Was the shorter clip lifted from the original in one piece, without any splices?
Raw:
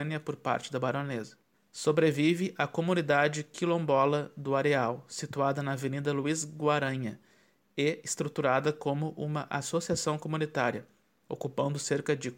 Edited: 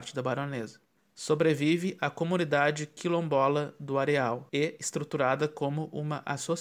no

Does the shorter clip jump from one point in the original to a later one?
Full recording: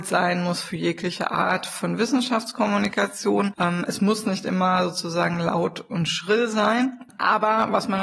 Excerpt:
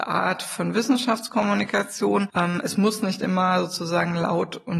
no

